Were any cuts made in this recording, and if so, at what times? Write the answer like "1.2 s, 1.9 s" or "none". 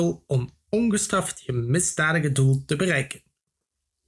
none

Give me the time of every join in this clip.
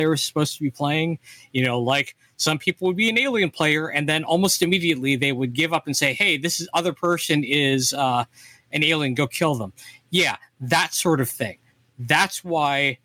none

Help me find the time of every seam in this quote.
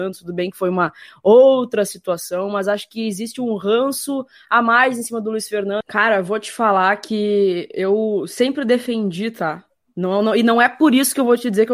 5.8 s

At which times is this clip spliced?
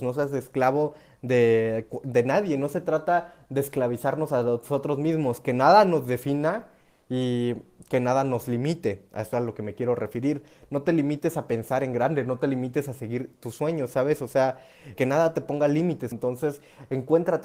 15.0 s, 16.1 s

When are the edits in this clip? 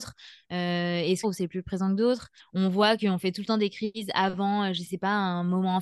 1.2 s, 2.4 s

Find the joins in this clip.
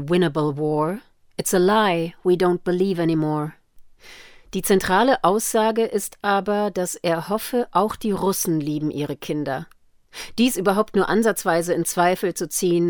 none

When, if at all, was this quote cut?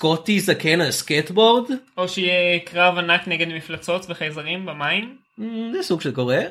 none

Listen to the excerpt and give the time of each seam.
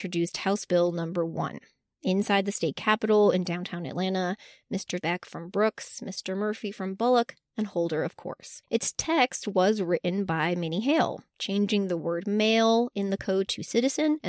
5.0 s

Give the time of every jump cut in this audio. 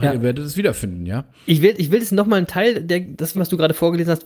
3.3 s

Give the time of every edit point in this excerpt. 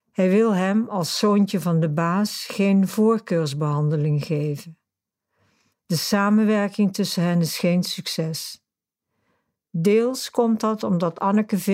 none

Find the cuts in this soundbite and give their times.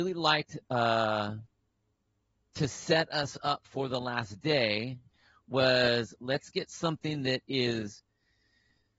none

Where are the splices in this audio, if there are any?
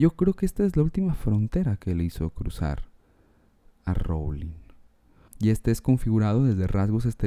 5.3 s

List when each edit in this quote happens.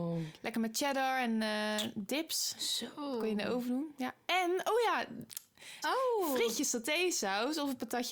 5.8 s

